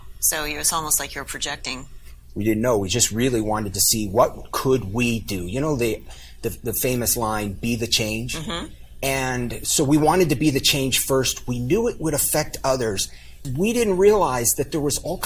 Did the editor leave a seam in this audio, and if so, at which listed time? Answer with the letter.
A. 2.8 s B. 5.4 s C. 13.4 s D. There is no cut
C